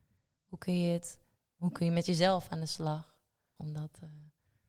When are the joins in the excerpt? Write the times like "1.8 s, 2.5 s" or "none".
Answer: 3.6 s